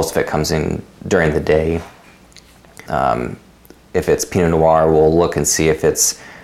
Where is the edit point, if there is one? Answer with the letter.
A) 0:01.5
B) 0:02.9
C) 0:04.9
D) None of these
B